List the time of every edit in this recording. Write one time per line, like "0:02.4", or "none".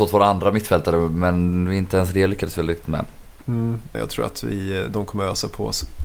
0:03.9